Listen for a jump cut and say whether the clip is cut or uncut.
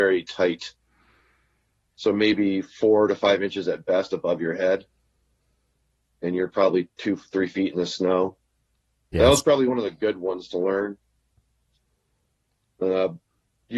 uncut